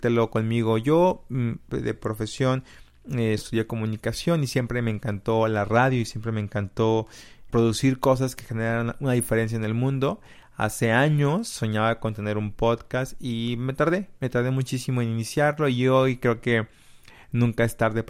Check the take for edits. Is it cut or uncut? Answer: cut